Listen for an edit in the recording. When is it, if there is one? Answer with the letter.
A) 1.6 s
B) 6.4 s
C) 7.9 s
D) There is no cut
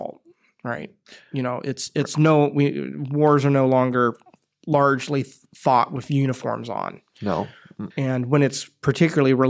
C